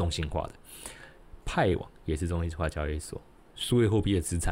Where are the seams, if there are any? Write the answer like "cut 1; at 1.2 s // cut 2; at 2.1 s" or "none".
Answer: cut 1; at 1.4 s // cut 2; at 3.4 s